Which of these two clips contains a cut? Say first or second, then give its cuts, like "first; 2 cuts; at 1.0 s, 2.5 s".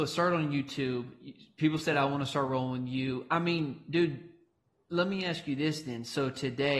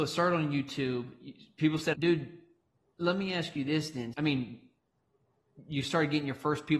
second; 2 cuts; at 1.9 s, 4.1 s